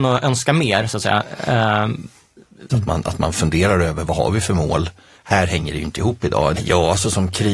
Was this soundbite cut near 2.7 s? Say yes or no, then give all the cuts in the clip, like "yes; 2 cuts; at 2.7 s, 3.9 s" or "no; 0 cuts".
yes; 3 cuts; at 2.7 s, 5.1 s, 6.5 s